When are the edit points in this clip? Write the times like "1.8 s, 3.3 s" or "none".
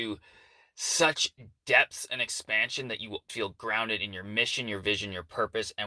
3.3 s